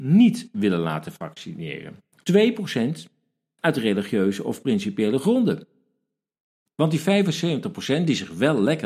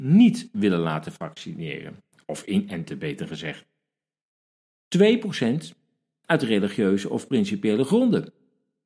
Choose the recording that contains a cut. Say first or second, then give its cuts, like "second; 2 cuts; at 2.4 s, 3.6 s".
first; 2 cuts; at 2.3 s, 6.7 s